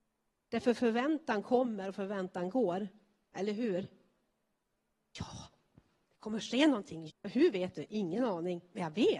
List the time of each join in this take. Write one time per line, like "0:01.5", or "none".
0:05.0
0:07.1